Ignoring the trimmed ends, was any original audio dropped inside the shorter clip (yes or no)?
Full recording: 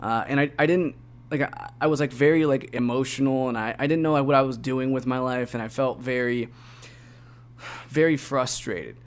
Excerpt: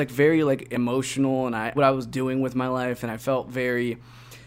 yes